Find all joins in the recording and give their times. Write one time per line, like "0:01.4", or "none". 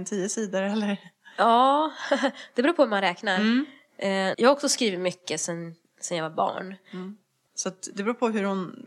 0:04.3
0:07.5